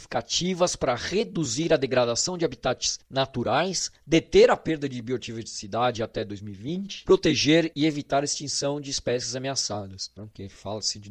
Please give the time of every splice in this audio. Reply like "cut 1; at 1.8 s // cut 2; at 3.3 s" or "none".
cut 1; at 10.2 s